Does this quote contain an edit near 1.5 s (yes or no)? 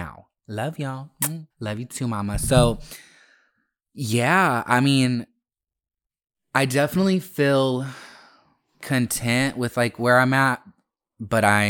yes